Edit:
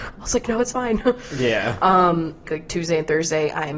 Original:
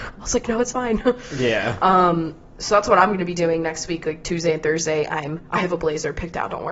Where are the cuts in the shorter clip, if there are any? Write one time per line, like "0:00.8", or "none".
0:02.4